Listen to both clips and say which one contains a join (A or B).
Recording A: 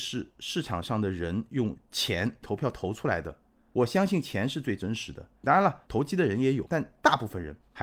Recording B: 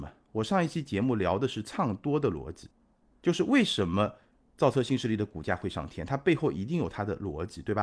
A